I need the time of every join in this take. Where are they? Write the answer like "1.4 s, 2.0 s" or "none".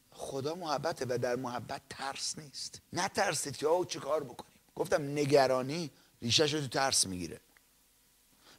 2.8 s, 4.7 s